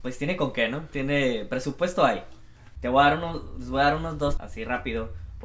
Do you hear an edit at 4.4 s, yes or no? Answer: yes